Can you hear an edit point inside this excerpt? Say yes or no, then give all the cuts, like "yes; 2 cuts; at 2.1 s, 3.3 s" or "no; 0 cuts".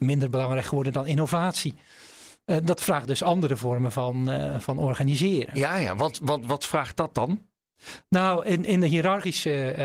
no; 0 cuts